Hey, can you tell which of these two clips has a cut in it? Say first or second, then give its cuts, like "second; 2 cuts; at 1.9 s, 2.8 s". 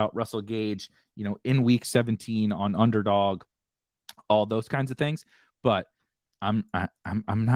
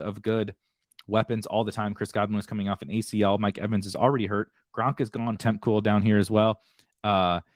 second; 1 cut; at 5.4 s